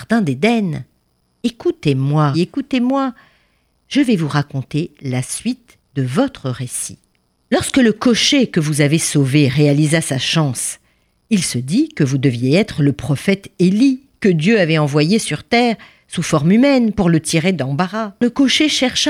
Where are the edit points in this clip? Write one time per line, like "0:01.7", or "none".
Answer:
0:02.3